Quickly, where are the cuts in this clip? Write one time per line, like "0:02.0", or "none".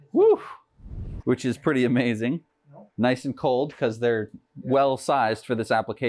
0:01.2
0:02.9